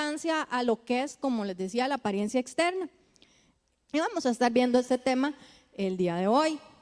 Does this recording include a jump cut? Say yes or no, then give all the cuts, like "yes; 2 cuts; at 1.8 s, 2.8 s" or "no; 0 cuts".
yes; 1 cut; at 3.7 s